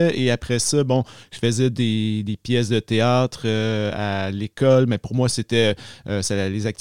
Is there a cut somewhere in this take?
no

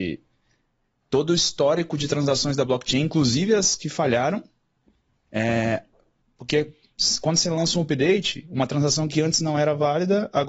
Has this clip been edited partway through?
no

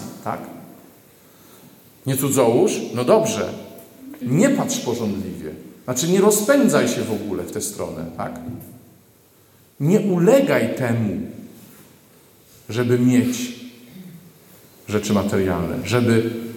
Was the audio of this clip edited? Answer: yes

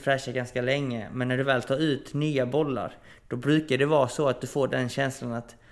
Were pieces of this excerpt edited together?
no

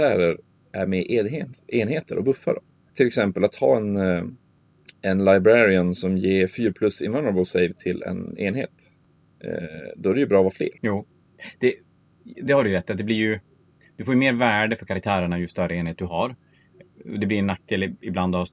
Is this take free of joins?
no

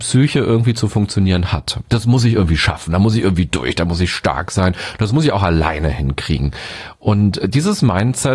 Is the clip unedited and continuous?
yes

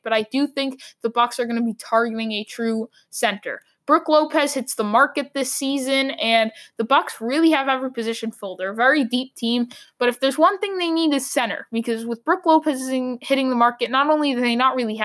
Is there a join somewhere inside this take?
no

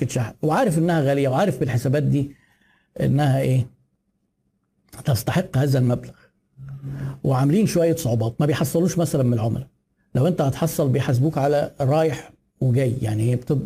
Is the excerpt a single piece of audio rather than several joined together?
yes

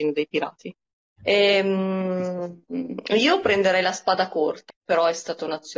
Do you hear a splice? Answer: yes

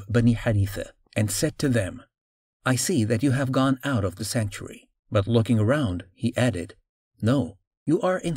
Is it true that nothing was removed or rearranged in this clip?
no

